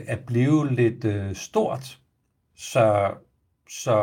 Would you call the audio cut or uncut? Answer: cut